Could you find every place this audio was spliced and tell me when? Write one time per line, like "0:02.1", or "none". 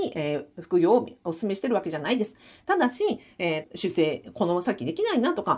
0:03.6